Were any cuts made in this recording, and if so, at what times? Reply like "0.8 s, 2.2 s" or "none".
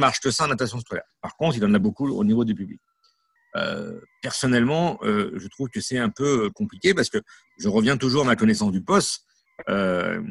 3.4 s